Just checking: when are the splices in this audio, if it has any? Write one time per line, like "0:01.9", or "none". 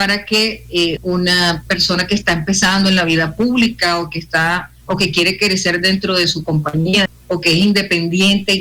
0:01.0
0:07.1